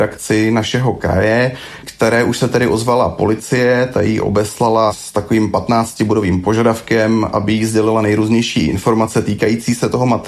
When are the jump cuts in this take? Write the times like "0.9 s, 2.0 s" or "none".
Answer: none